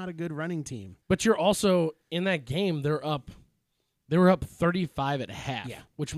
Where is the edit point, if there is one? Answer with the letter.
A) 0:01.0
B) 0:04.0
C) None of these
A